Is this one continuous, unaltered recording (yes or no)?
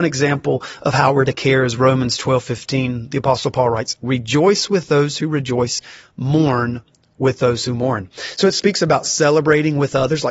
yes